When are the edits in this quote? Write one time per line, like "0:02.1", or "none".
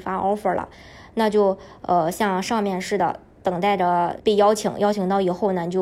0:04.2